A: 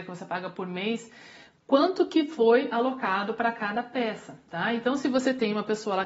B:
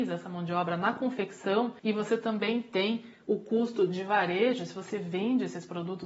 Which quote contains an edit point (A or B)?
B